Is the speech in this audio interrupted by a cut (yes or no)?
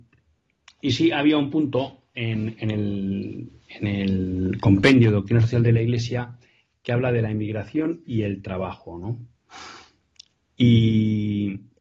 yes